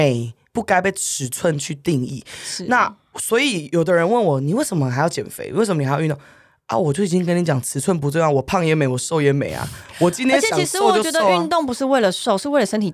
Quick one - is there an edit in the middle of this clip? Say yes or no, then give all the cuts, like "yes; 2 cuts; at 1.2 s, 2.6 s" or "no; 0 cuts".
no; 0 cuts